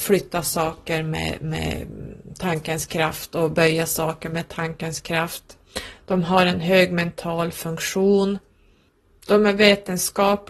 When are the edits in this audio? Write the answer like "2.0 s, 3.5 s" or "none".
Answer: none